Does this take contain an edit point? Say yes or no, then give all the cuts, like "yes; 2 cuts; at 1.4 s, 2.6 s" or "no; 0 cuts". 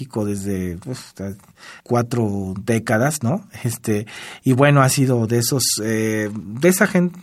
yes; 1 cut; at 1.8 s